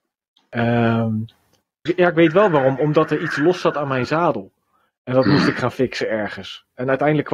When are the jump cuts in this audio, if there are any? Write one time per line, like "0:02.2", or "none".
0:01.9

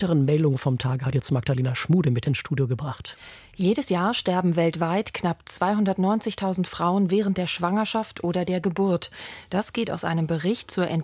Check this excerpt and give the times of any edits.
none

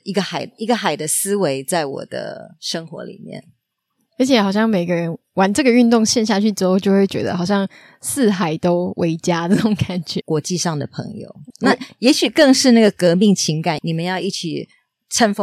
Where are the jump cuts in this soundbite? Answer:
0:10.2
0:11.5
0:13.8

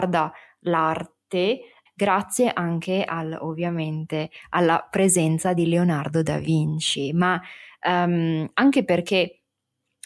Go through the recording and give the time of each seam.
0:01.9

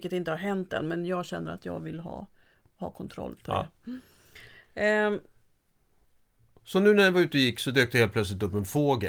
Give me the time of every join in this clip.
none

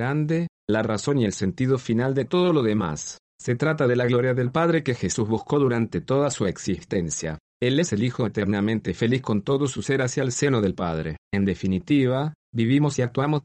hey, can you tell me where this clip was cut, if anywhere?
0:11.2
0:12.4

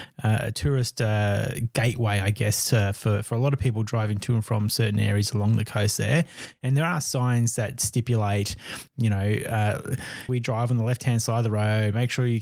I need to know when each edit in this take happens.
0:10.3

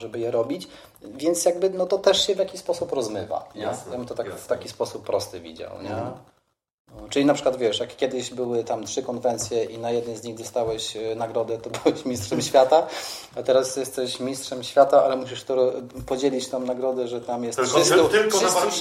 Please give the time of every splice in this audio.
none

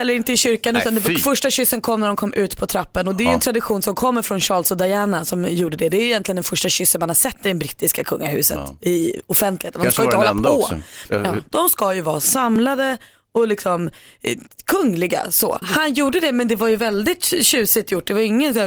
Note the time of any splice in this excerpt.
0:11.5
0:15.6

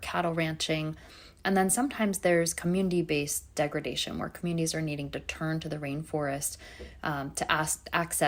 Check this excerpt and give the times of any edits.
none

